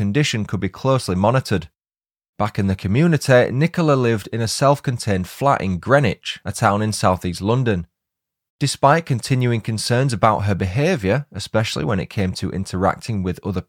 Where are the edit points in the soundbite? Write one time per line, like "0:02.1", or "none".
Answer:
0:02.3
0:08.5